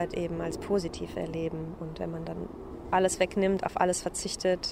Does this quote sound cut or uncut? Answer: uncut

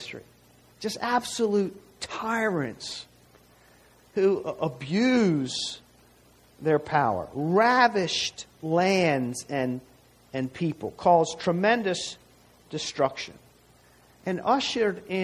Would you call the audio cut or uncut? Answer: uncut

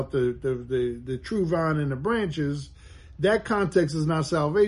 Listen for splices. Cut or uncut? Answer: uncut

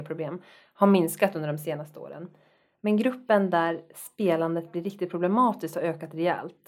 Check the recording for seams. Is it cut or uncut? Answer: uncut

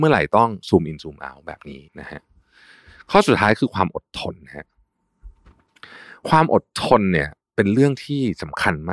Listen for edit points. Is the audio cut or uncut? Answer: cut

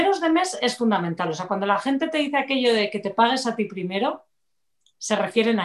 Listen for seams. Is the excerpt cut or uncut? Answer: uncut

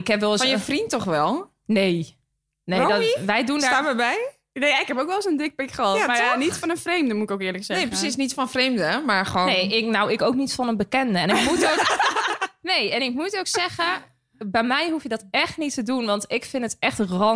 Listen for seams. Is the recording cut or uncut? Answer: uncut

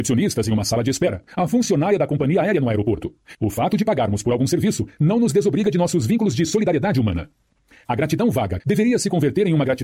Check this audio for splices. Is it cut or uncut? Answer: cut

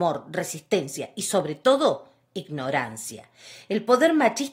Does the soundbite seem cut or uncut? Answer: uncut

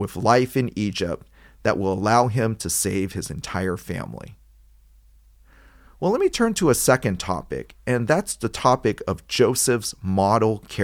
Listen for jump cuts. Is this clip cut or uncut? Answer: uncut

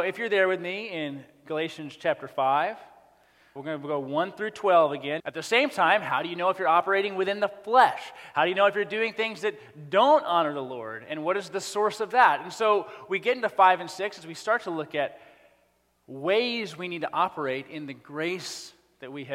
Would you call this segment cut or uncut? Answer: cut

